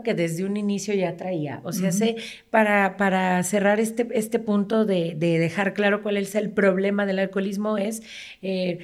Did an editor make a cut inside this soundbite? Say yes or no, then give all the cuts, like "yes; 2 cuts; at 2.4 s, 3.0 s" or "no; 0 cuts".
no; 0 cuts